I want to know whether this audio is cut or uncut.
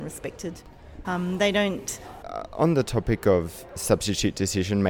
cut